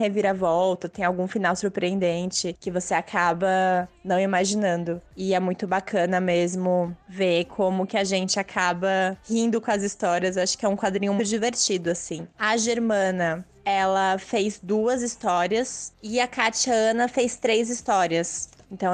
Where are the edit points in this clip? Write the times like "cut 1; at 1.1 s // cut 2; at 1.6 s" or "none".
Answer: cut 1; at 5.1 s // cut 2; at 11.2 s // cut 3; at 12.3 s